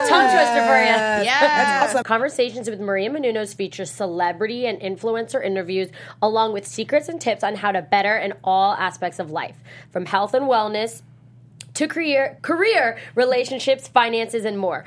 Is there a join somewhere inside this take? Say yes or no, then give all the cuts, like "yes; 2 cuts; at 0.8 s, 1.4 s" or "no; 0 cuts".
yes; 2 cuts; at 2.0 s, 12.4 s